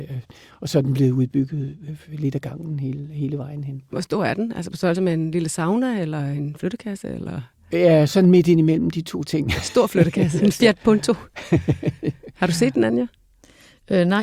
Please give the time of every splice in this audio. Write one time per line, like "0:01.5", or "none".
0:10.4